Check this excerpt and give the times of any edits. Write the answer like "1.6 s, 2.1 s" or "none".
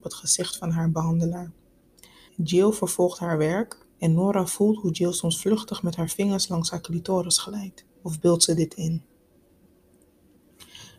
2.3 s, 3.9 s, 8.0 s